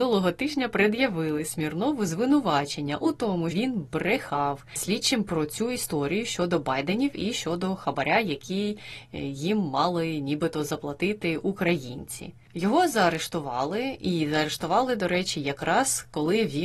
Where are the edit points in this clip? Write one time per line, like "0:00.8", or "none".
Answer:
0:03.5